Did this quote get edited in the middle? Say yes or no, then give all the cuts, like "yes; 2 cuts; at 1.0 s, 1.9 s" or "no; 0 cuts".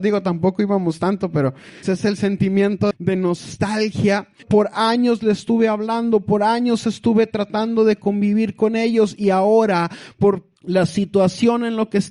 yes; 3 cuts; at 1.8 s, 2.9 s, 4.4 s